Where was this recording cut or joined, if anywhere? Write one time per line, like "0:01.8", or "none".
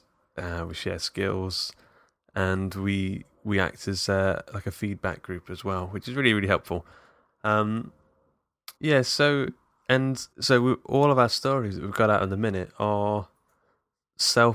0:08.8
0:10.3